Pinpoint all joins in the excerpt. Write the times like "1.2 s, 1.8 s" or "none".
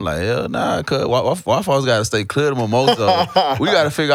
none